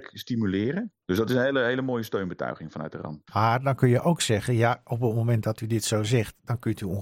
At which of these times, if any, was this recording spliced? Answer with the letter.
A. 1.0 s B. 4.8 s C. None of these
A